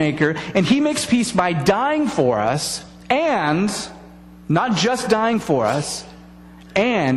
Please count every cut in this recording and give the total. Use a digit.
0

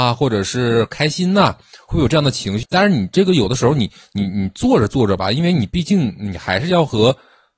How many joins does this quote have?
1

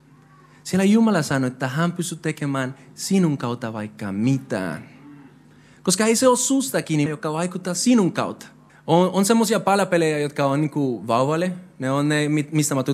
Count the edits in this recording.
2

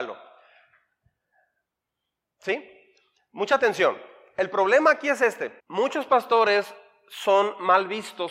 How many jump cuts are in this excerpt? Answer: 1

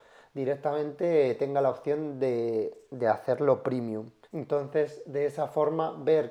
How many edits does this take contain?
1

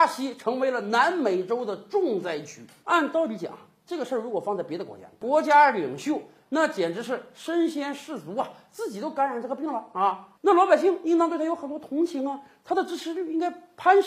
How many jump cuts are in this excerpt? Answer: 1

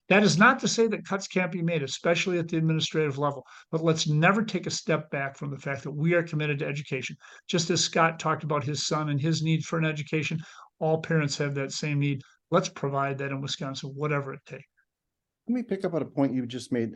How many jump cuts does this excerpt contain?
0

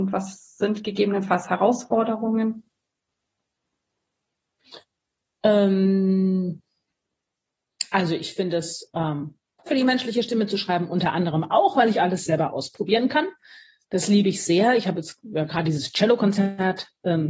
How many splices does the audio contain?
1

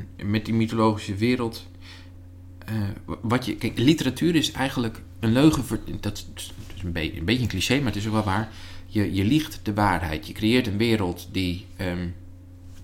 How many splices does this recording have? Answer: 0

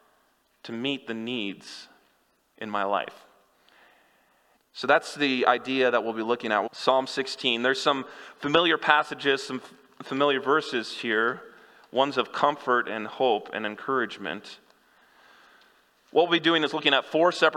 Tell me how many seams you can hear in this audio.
2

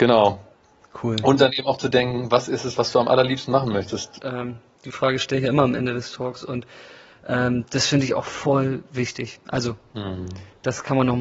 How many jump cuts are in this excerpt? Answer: 1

